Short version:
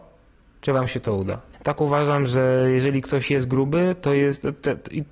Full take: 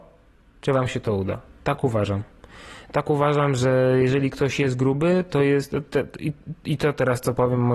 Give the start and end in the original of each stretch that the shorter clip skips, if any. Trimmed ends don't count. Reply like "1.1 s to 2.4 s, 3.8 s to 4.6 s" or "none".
1.5 s to 2.8 s